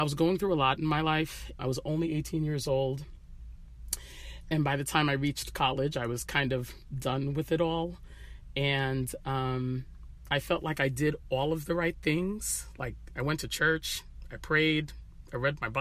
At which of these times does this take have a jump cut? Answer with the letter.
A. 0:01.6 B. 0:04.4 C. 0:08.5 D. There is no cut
A